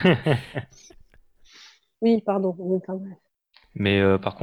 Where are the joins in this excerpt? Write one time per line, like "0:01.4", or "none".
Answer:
none